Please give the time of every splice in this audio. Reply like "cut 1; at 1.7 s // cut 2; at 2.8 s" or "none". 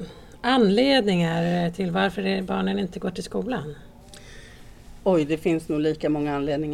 none